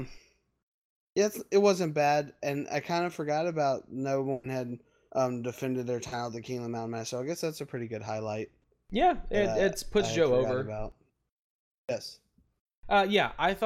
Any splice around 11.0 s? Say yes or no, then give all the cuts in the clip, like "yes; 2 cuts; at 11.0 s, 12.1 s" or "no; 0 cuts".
no; 0 cuts